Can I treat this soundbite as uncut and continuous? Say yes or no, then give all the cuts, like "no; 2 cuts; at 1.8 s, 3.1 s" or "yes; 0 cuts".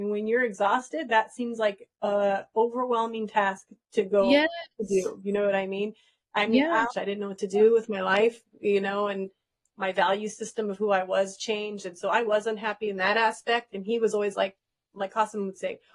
no; 1 cut; at 6.9 s